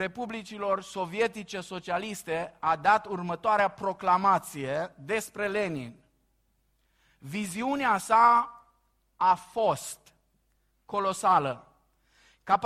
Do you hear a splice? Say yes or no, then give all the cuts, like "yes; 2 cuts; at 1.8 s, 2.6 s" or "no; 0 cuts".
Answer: no; 0 cuts